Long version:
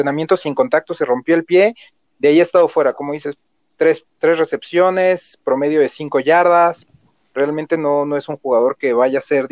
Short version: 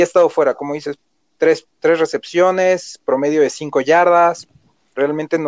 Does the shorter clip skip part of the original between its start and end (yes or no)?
no